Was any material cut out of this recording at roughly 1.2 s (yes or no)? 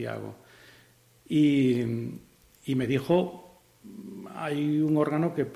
yes